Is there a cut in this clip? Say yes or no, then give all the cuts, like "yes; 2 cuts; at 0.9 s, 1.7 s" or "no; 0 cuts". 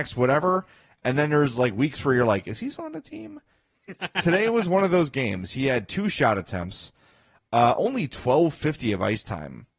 no; 0 cuts